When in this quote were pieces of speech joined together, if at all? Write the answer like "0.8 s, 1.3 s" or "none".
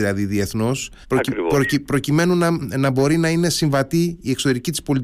1.0 s, 2.6 s